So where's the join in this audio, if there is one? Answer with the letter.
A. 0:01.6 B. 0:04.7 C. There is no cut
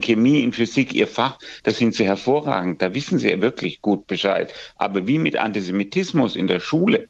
C